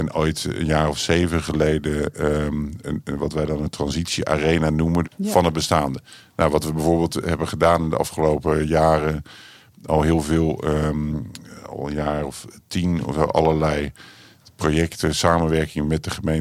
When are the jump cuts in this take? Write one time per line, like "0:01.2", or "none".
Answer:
0:05.0